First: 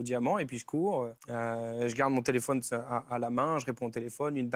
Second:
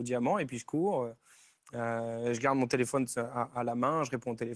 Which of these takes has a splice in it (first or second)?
first